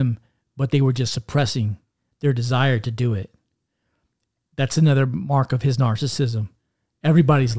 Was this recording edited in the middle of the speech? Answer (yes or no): no